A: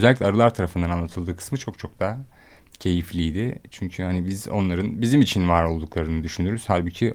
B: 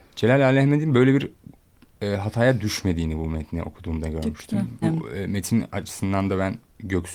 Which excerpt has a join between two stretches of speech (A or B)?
B